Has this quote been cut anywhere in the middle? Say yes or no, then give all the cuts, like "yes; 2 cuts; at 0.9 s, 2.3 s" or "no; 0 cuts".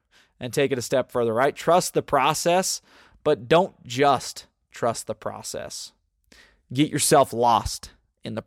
no; 0 cuts